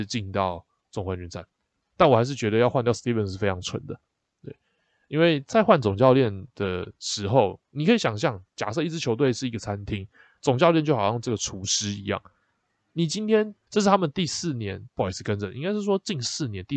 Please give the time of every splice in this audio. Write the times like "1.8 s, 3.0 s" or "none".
13.7 s, 14.9 s